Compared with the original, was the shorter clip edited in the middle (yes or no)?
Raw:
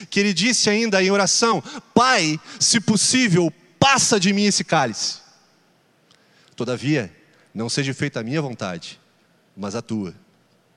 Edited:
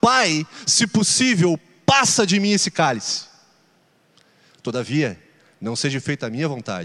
no